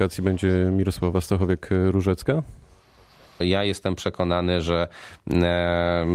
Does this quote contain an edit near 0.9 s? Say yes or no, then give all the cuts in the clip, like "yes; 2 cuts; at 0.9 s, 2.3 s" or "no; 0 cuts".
no; 1 cut; at 3.4 s